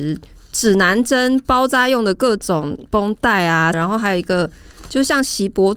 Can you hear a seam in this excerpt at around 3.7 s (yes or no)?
yes